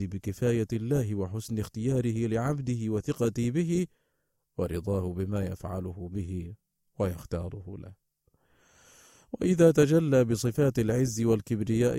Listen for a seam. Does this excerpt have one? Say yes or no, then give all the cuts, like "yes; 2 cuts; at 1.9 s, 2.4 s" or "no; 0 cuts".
no; 0 cuts